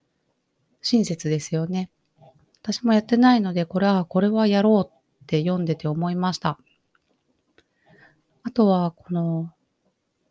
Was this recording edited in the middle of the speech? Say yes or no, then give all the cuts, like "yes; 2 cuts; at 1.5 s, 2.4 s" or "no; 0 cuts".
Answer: no; 0 cuts